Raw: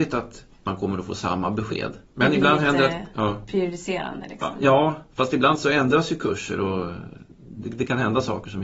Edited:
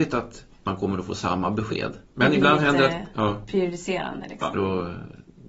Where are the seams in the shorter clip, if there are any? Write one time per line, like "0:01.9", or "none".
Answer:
0:04.5